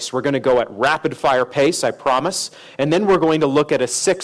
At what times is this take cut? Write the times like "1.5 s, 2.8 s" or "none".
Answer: none